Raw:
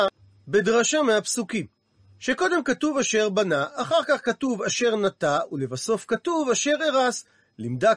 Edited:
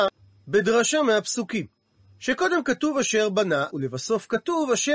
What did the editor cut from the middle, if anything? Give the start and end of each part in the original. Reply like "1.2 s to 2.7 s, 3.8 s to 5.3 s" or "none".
3.7 s to 5.5 s